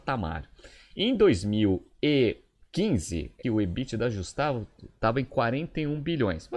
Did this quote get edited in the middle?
yes; 1 cut; at 3.4 s

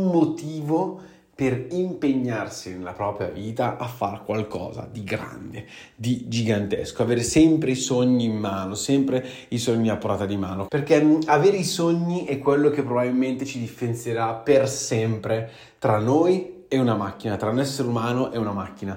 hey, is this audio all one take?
no; 1 cut; at 10.7 s

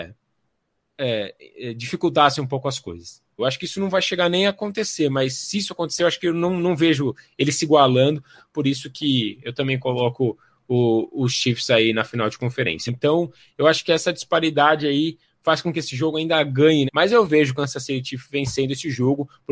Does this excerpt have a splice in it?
yes; 3 cuts; at 3.4 s, 12.9 s, 16.9 s

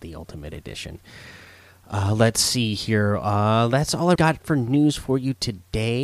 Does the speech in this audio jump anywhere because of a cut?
yes; 1 cut; at 4.2 s

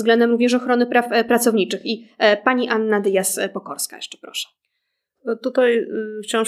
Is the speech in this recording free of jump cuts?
yes; 0 cuts

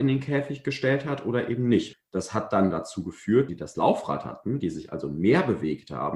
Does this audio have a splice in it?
yes; 2 cuts; at 1.9 s, 3.5 s

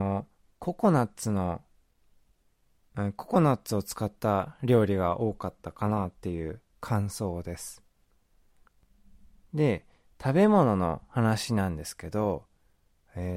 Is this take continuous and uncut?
no; 1 cut; at 9.5 s

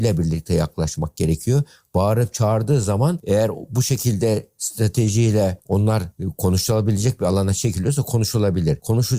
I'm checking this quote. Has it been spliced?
no; 0 cuts

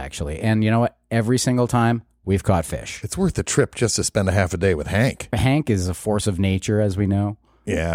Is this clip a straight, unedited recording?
yes; 0 cuts

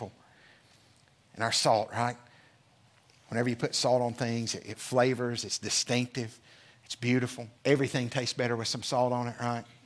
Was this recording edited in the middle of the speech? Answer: yes; 1 cut; at 7.6 s

